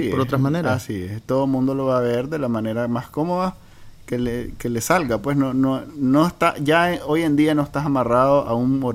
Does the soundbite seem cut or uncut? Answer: uncut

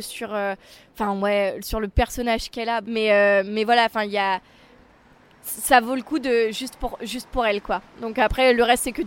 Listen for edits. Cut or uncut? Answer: cut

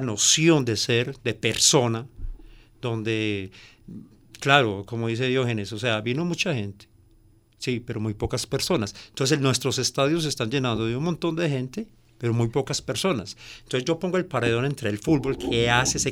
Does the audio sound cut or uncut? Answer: uncut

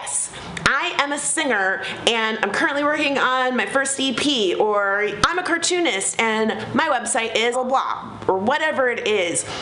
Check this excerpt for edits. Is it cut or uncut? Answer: cut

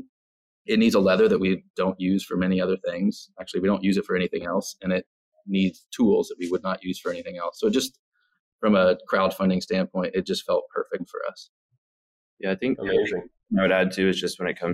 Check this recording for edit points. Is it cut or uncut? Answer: uncut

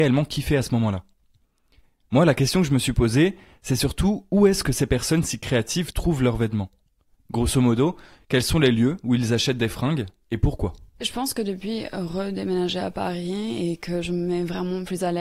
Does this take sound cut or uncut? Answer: uncut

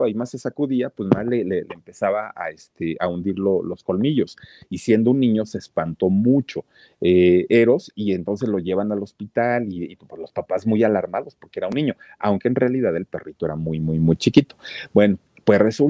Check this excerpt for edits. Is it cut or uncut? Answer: uncut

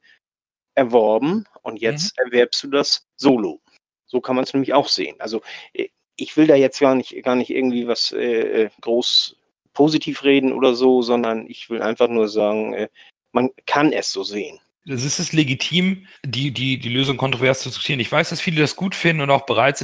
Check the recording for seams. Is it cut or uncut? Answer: cut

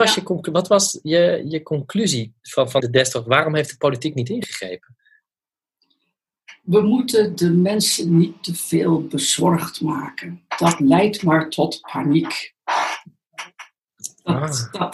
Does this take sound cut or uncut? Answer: cut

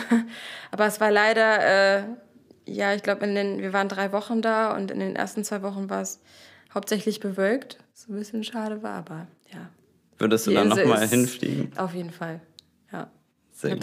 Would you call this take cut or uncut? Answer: uncut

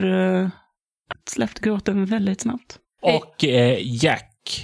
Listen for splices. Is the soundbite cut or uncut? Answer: cut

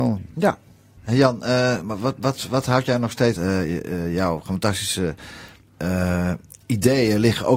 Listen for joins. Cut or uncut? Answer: cut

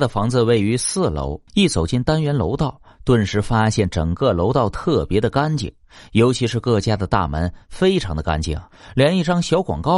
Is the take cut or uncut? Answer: cut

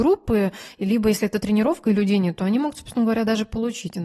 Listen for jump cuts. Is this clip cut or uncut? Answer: uncut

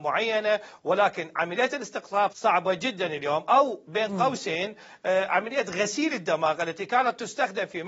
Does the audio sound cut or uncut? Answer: cut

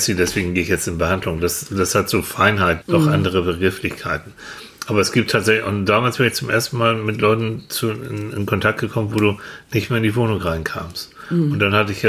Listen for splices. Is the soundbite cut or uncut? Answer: cut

